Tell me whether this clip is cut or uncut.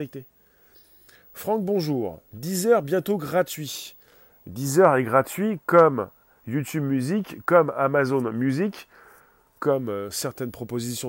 uncut